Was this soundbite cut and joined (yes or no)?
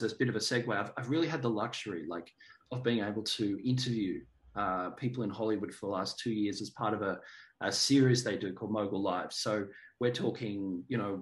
yes